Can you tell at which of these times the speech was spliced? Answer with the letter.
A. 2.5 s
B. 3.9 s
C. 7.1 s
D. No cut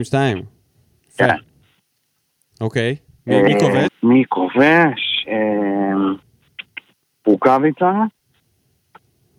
B